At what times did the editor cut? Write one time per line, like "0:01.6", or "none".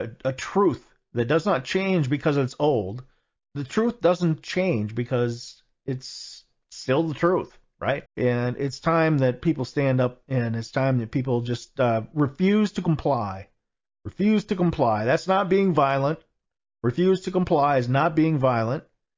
0:08.1